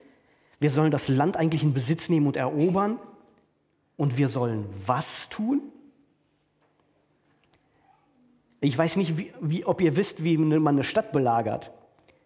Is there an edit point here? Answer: no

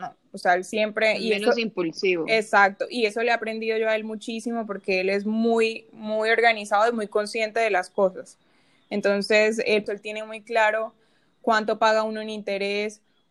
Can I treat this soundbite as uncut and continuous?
no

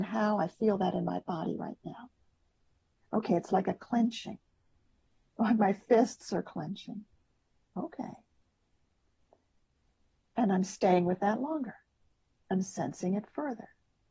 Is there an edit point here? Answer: no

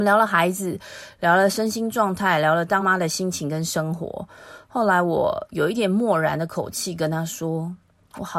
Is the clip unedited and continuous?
no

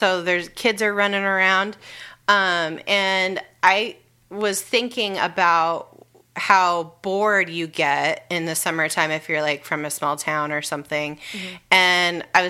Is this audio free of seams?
yes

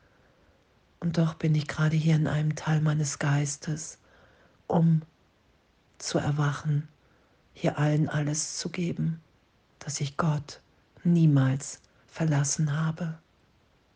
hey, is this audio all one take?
no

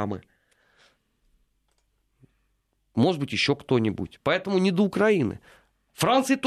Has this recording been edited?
no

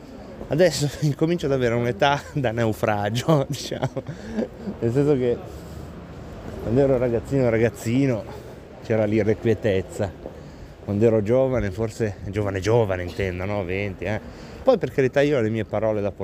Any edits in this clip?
yes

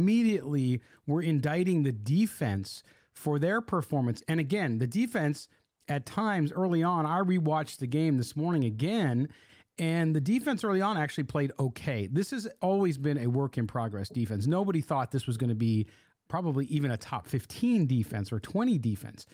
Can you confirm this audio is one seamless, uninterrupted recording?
yes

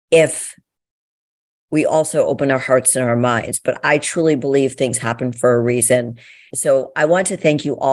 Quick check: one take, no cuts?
no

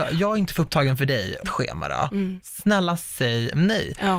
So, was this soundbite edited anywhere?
yes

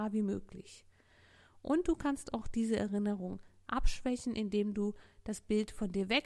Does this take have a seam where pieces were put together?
no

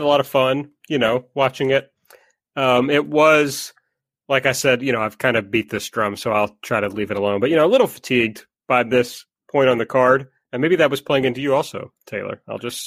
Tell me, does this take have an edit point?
no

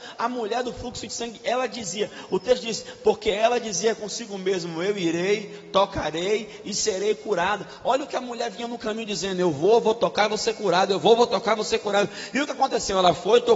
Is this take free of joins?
yes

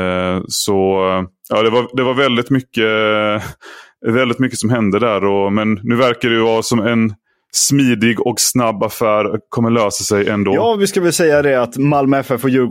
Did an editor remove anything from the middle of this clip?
no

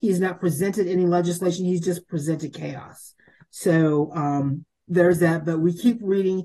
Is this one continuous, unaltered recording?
yes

